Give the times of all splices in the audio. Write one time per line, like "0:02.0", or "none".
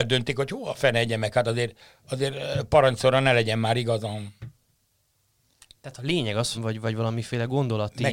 0:06.5